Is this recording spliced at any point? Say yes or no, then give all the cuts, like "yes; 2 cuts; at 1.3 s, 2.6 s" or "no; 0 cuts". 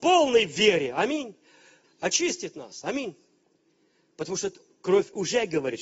yes; 1 cut; at 1.8 s